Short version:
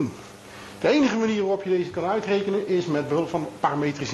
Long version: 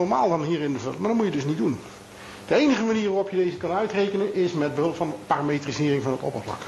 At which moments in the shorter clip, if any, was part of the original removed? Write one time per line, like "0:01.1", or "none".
none

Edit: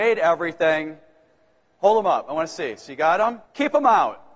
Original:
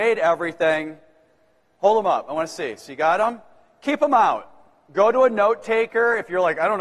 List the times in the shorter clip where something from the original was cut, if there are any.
0:03.4

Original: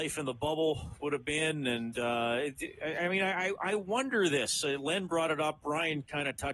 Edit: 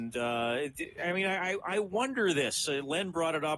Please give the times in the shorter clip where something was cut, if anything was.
0:01.0

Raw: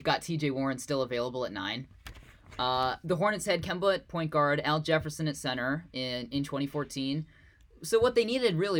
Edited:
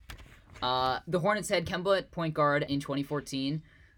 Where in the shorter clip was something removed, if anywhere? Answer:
0:02.7

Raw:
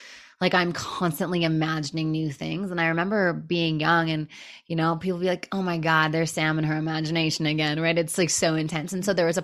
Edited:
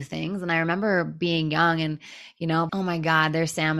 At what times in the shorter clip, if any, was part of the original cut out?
0:02.7

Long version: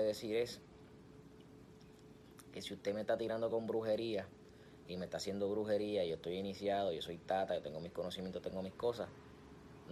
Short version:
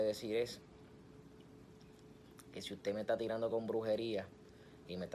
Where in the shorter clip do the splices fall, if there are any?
none

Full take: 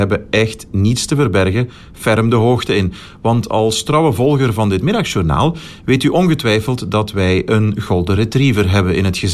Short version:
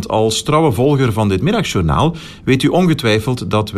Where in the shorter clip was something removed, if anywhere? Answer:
none

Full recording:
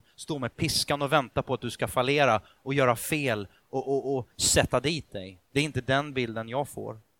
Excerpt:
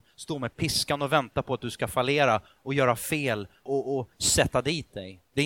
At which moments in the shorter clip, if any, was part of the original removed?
0:03.7

